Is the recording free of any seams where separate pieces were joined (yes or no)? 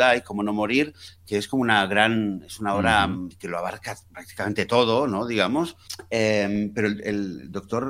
yes